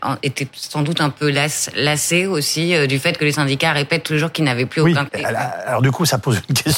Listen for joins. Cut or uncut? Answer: cut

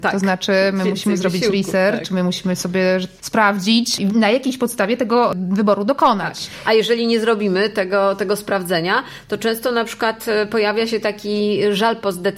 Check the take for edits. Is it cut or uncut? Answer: uncut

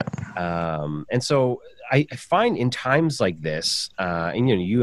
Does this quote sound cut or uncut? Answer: uncut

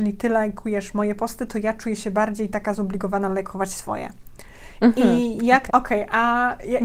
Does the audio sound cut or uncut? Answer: cut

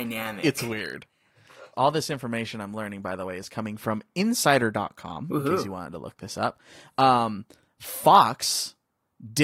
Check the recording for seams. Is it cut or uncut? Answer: cut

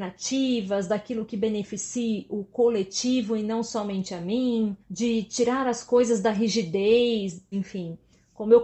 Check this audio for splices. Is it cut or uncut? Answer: cut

